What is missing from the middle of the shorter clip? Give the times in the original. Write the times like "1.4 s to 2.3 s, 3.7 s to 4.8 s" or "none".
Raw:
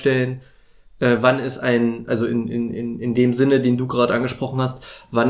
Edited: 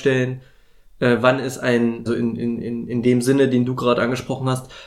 2.1 s to 2.2 s